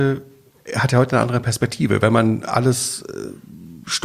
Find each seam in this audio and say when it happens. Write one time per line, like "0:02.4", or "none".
none